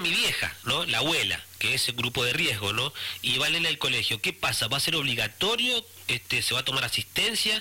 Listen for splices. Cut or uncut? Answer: uncut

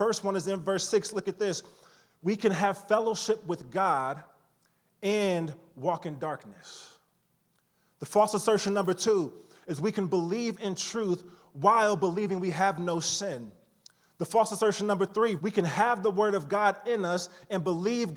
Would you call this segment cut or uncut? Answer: cut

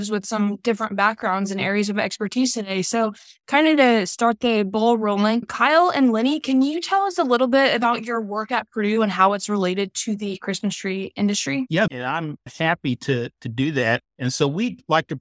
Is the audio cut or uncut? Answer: cut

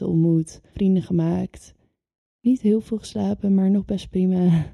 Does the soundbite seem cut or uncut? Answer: uncut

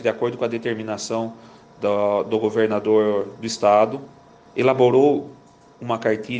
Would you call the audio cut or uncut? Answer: cut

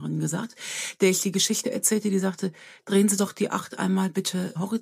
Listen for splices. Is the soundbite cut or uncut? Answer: uncut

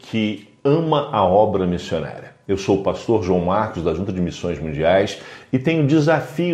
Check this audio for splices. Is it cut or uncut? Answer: uncut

